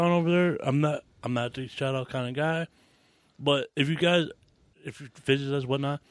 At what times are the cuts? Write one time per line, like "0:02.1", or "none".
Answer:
0:04.7